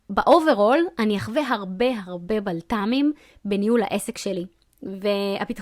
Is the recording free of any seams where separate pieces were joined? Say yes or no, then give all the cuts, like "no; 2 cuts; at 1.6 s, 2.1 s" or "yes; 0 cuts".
yes; 0 cuts